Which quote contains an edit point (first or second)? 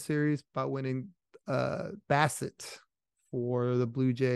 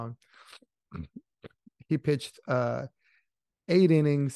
first